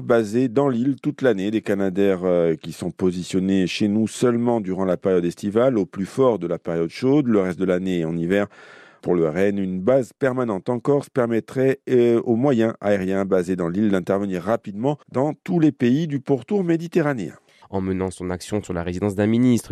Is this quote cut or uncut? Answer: cut